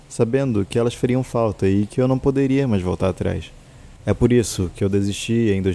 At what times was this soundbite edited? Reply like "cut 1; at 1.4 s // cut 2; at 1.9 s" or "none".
cut 1; at 4.0 s